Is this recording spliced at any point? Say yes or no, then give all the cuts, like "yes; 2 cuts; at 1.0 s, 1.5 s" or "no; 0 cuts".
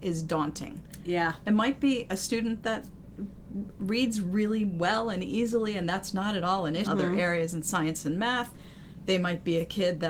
yes; 1 cut; at 6.8 s